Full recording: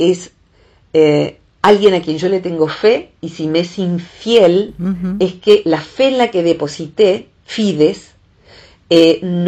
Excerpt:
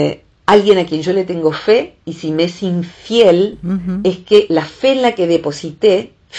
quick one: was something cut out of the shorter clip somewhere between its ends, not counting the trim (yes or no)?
no